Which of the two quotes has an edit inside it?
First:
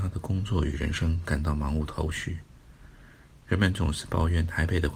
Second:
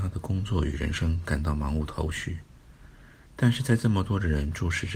second; 1 cut; at 3.3 s

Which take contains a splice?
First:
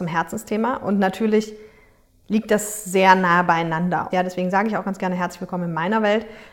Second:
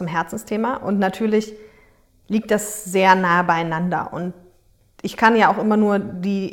first; 1 cut; at 4.1 s

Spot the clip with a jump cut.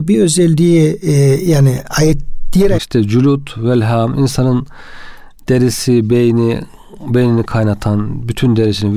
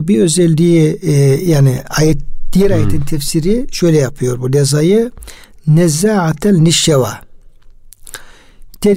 first; 1 cut; at 2.8 s

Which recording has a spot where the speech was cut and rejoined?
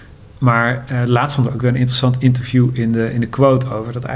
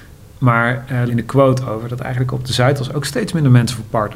second; 1 cut; at 1.1 s

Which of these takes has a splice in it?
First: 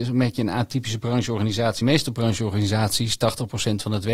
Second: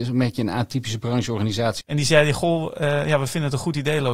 second; 1 cut; at 1.8 s

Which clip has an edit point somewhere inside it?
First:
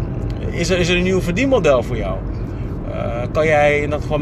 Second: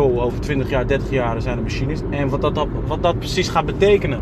second; 1 cut; at 2.0 s

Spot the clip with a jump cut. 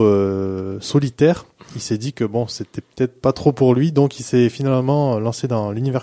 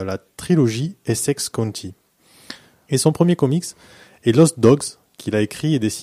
second; 1 cut; at 2.9 s

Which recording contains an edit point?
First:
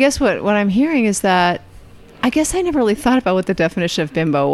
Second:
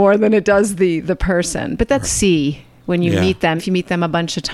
second; 2 cuts; at 2.0 s, 3.6 s

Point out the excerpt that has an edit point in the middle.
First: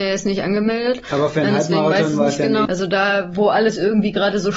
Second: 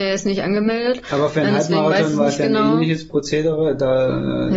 first; 1 cut; at 2.7 s

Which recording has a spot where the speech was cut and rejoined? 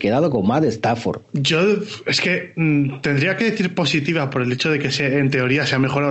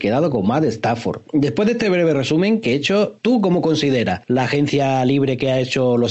first; 1 cut; at 1.2 s

